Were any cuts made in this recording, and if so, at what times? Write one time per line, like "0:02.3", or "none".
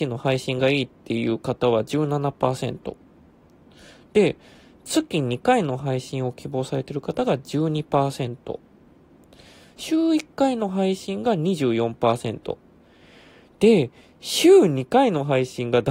none